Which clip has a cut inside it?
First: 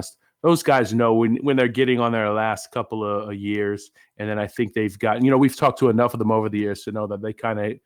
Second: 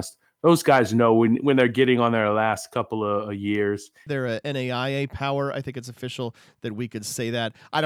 second; 1 cut; at 4.1 s

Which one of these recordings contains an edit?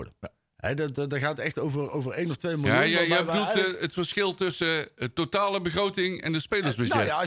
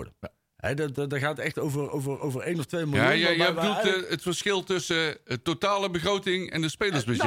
first; 1 cut; at 1.9 s

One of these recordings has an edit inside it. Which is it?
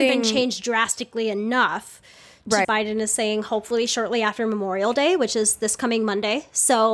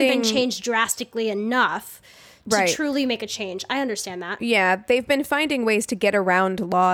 first; 1 cut; at 2.6 s

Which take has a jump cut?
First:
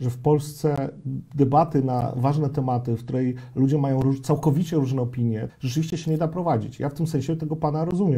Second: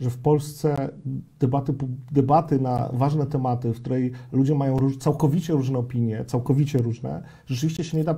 first; 2 cuts; at 1.3 s, 5.5 s

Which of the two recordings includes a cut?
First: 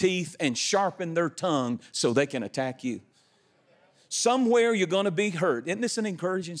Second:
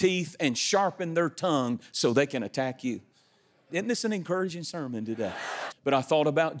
second; 2 cuts; at 3.7 s, 5.7 s

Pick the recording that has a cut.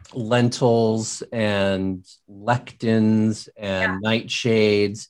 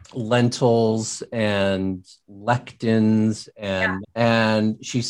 second; 1 cut; at 4.0 s

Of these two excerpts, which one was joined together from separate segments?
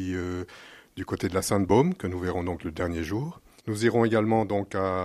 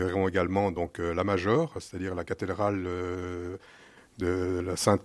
first; 1 cut; at 3.6 s

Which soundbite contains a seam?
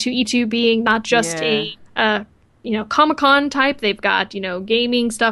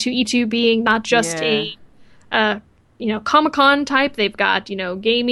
first; 1 cut; at 1.8 s

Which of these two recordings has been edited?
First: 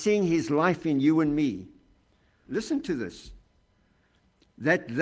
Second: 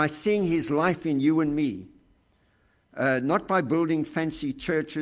first; 1 cut; at 2.5 s

